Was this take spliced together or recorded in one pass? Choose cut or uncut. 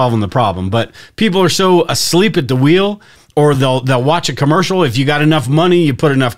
uncut